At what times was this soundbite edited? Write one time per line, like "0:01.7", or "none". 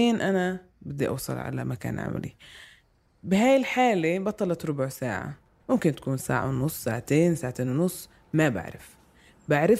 0:06.2